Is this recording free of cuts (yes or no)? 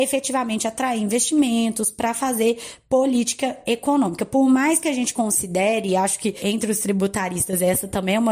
yes